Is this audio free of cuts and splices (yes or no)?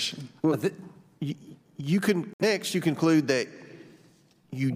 yes